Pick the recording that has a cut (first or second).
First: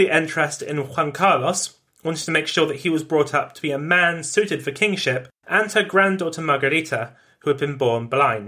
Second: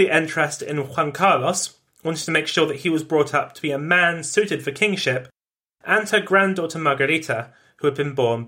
first